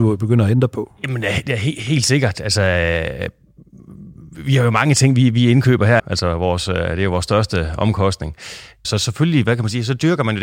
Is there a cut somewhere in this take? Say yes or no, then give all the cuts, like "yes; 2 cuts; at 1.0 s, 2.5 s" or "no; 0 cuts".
yes; 2 cuts; at 6.0 s, 8.8 s